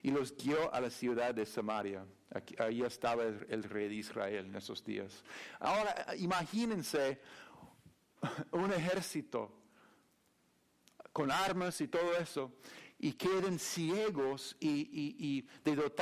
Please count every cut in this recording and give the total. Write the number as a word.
zero